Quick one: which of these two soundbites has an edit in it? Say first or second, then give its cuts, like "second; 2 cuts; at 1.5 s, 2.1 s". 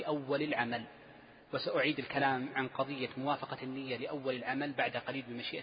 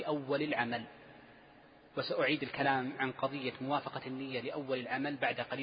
first; 1 cut; at 1.4 s